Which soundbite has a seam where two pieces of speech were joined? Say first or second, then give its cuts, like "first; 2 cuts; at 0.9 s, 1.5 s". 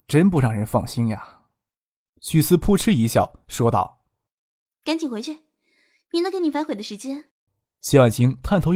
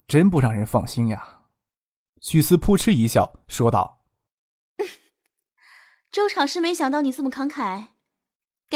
first; 2 cuts; at 4.7 s, 7.3 s